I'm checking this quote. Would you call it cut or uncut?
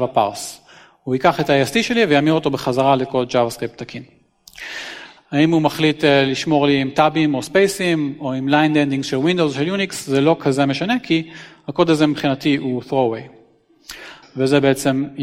cut